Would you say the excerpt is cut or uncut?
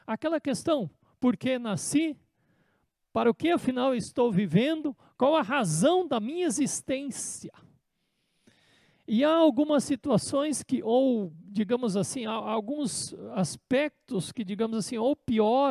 uncut